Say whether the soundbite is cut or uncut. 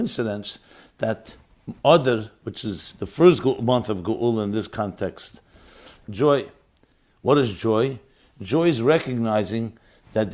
cut